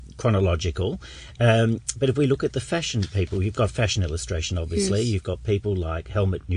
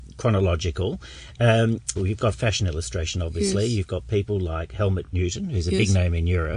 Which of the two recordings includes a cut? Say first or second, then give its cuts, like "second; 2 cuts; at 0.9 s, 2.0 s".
second; 1 cut; at 2.0 s